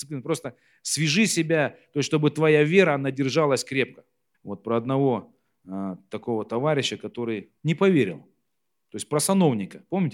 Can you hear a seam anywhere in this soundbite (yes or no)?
yes